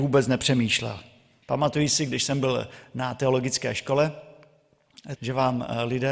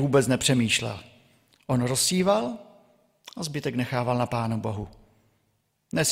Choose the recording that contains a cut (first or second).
first